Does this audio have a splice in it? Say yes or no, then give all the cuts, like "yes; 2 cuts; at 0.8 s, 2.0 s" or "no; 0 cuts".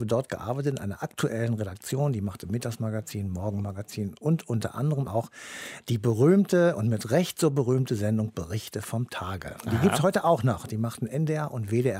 yes; 1 cut; at 5.1 s